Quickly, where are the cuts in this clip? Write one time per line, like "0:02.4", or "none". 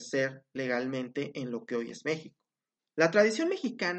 0:02.8